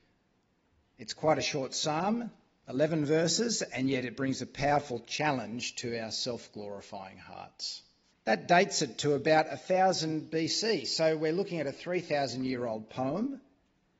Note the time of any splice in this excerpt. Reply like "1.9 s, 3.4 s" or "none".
8.1 s